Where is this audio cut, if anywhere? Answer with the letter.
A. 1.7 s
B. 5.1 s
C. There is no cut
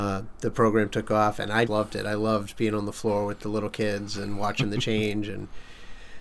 A